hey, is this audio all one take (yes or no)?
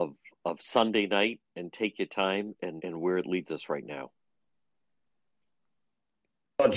no